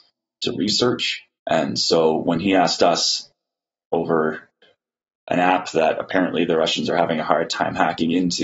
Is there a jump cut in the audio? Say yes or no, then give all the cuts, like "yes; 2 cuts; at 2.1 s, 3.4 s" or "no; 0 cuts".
yes; 1 cut; at 1.4 s